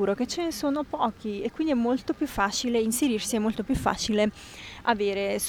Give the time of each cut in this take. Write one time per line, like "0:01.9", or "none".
none